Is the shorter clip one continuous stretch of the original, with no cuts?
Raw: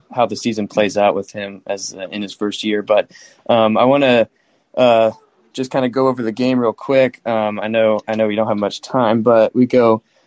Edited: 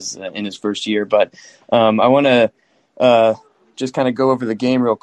yes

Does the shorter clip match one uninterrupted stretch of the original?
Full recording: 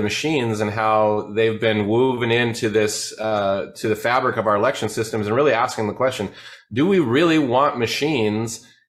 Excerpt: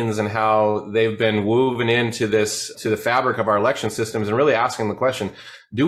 no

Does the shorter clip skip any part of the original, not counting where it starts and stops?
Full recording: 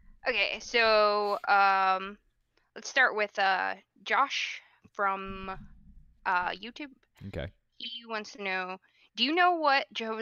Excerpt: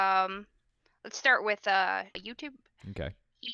yes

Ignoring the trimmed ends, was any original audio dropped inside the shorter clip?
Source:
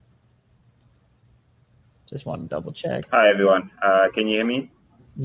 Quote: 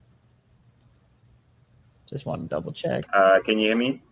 yes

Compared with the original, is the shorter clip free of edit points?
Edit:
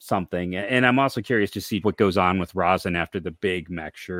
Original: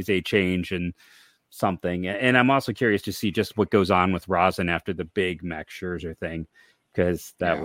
no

